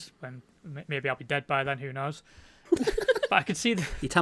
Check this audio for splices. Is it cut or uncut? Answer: uncut